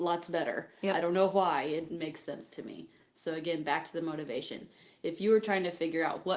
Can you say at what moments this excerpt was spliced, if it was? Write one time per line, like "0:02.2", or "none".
0:01.9